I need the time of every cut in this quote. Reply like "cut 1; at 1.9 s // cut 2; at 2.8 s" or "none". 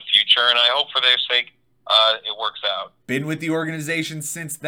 cut 1; at 3.0 s